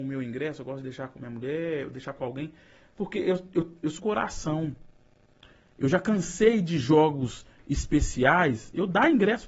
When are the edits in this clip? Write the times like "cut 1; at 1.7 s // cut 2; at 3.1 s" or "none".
cut 1; at 4.0 s